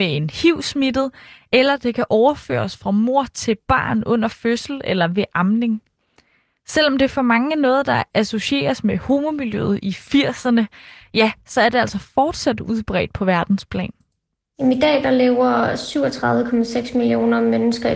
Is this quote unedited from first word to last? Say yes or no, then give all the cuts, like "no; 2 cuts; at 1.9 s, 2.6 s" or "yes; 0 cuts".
yes; 0 cuts